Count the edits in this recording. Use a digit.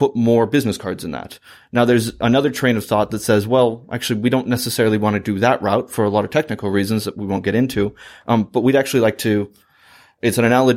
0